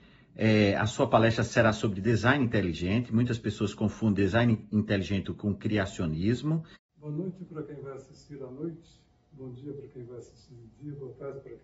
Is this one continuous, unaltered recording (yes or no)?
no